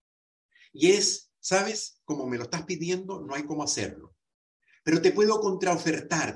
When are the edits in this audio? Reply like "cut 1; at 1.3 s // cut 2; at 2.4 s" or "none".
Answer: none